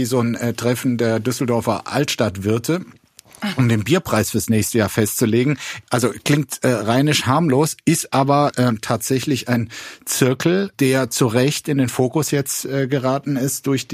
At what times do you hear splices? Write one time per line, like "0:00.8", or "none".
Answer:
none